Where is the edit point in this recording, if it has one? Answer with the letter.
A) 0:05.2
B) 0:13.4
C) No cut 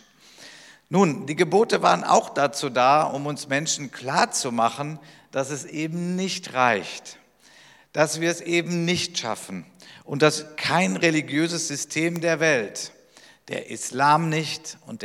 C